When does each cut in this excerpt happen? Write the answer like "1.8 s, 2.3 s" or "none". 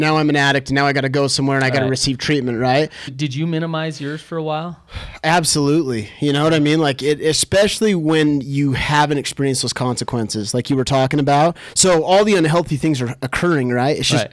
3.1 s